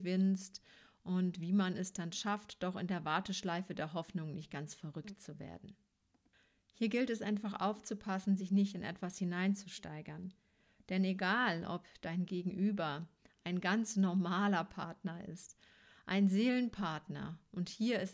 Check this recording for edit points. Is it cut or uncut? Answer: uncut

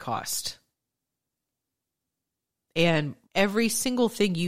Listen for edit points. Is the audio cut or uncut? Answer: cut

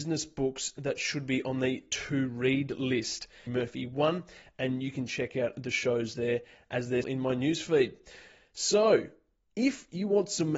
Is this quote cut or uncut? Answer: cut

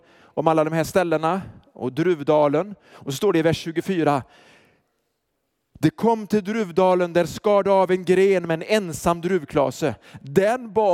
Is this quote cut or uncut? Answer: uncut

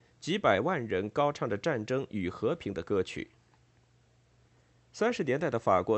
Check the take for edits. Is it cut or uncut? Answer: uncut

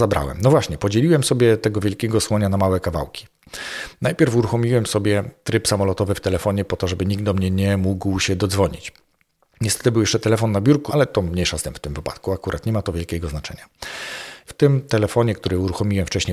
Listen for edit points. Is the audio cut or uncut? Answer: cut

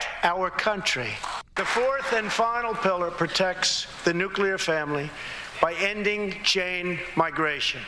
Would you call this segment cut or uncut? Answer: cut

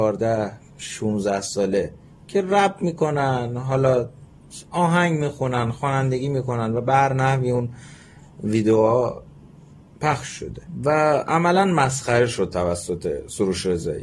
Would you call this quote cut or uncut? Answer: uncut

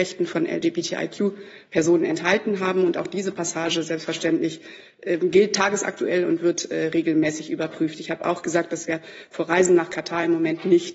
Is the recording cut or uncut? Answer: uncut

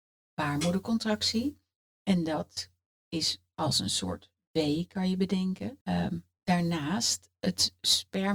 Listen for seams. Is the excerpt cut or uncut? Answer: cut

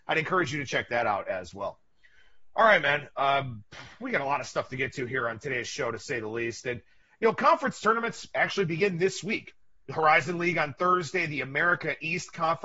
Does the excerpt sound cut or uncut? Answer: uncut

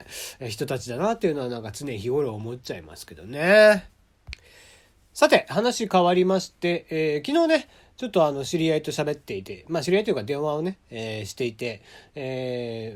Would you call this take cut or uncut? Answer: uncut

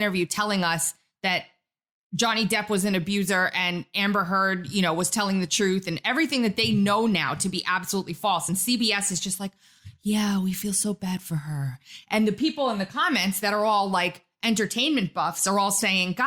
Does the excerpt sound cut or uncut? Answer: uncut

